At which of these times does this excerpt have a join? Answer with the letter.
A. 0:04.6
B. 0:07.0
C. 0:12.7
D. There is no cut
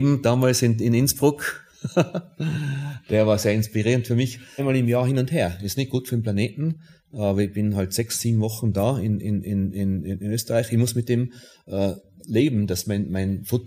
A